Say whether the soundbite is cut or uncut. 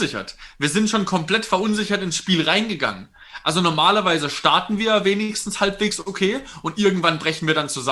uncut